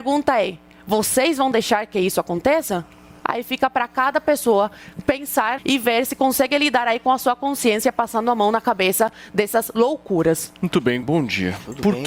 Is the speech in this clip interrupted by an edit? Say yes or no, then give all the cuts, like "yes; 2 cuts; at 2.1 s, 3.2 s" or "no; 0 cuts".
yes; 2 cuts; at 5.6 s, 11.0 s